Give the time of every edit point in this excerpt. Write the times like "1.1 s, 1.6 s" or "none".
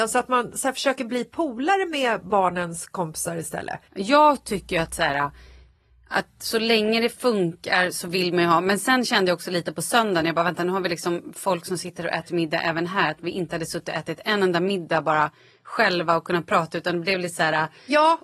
3.9 s